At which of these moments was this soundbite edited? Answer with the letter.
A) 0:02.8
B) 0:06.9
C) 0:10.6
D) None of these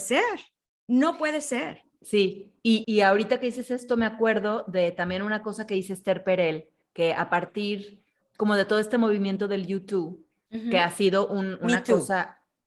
A